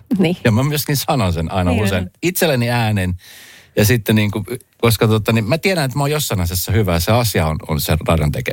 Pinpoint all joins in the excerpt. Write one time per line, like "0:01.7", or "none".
none